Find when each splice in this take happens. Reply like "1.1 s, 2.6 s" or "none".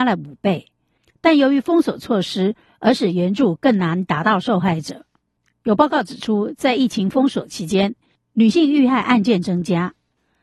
none